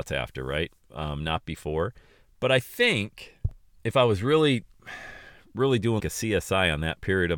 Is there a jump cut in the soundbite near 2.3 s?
no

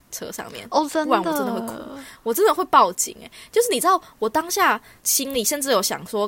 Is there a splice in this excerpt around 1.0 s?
no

